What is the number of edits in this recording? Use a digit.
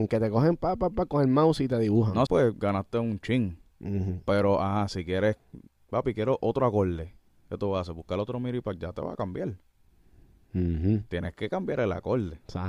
1